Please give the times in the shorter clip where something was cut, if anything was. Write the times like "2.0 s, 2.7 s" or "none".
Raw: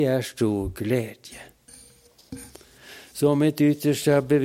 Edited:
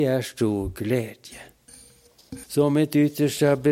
2.4 s